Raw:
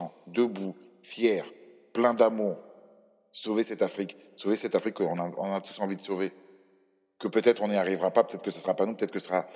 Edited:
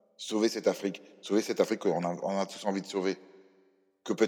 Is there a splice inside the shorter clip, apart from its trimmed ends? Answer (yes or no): no